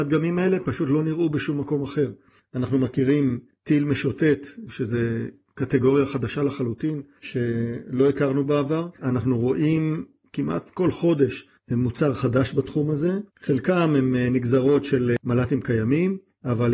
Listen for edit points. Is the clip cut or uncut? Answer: cut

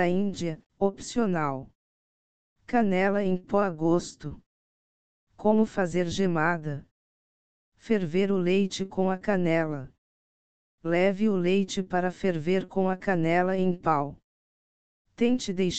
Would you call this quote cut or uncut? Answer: uncut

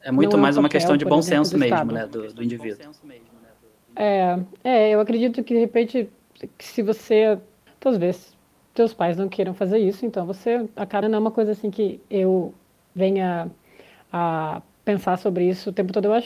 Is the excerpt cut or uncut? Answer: cut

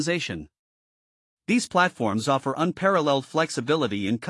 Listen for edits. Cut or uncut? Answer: uncut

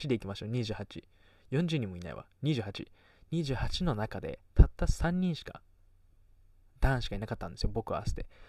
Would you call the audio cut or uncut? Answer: uncut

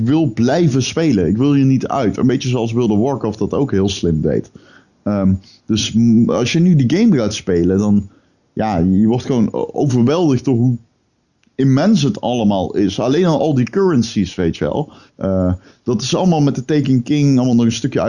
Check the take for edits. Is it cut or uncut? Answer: cut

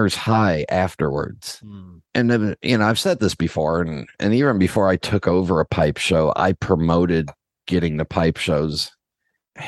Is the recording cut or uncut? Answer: uncut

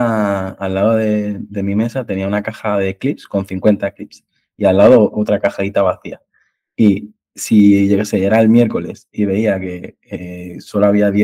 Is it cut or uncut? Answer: uncut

